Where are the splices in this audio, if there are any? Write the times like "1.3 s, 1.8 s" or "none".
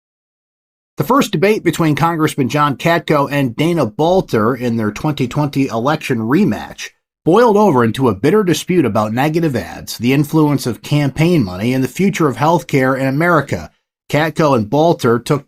none

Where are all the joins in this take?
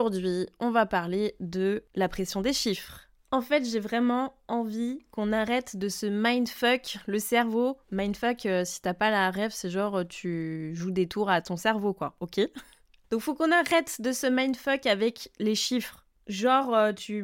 none

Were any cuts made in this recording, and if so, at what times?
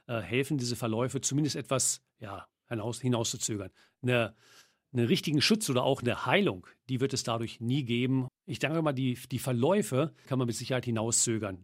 8.3 s, 10.3 s

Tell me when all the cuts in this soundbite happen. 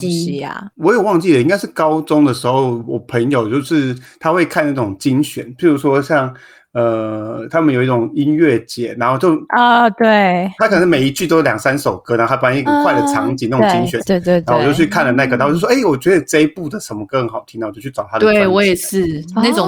12.7 s, 14.0 s

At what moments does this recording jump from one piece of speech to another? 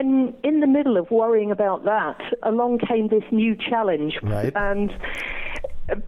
2.4 s, 4.2 s

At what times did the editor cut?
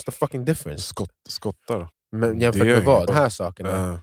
1.9 s, 3.1 s

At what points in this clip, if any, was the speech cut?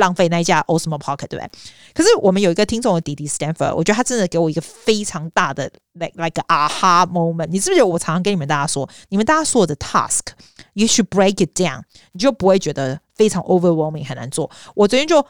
none

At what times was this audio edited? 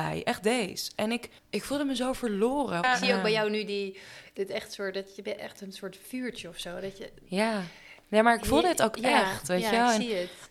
1.4 s, 2.8 s

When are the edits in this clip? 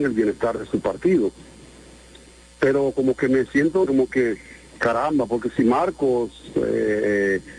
3.9 s

